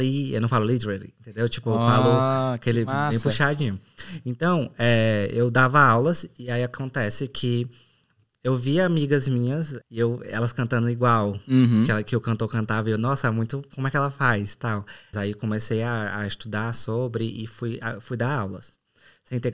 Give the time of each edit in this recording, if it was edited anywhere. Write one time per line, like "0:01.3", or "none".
0:09.8
0:15.1